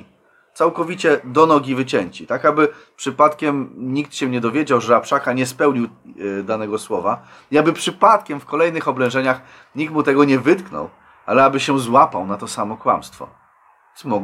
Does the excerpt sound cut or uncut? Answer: uncut